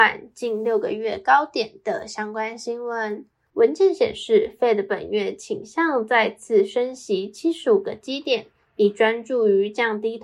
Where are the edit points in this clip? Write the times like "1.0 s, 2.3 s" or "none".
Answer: 3.5 s